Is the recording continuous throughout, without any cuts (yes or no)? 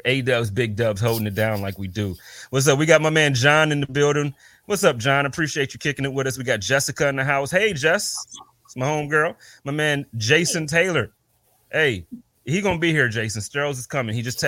yes